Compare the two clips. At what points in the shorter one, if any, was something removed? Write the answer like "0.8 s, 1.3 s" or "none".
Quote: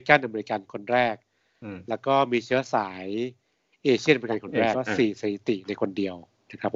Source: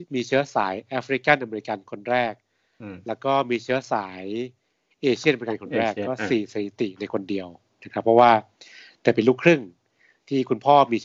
4.7 s